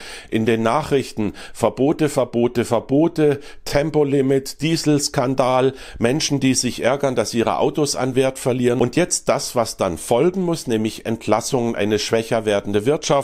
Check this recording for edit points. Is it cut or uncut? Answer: uncut